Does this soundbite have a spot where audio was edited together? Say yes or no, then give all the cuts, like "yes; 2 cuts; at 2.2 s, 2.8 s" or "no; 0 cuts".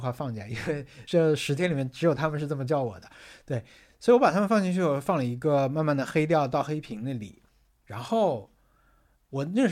no; 0 cuts